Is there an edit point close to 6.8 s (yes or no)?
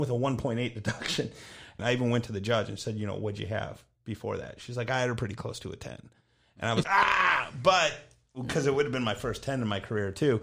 yes